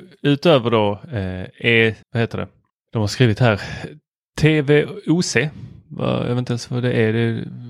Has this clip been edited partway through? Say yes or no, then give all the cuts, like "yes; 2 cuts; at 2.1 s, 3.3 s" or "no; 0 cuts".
yes; 1 cut; at 2.0 s